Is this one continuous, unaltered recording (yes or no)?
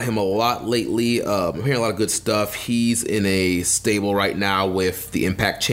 yes